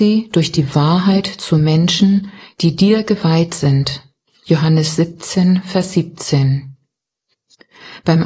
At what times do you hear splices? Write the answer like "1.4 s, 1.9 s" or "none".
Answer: 4.3 s